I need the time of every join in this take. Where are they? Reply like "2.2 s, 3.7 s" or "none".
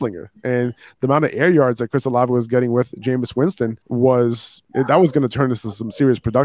3.8 s